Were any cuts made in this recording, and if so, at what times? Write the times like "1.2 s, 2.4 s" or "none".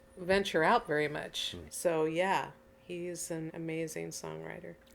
1.7 s, 3.5 s